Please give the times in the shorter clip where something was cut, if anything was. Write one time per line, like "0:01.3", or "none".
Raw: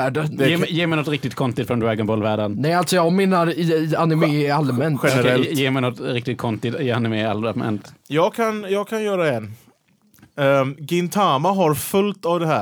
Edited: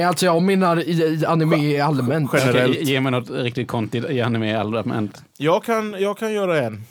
none